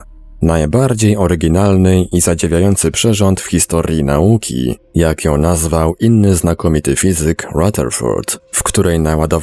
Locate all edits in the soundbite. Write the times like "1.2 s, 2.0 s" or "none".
none